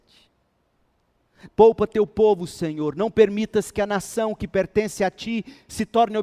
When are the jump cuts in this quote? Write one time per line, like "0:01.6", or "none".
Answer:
0:01.5